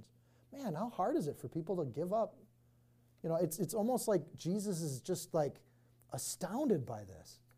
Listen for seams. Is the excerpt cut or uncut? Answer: uncut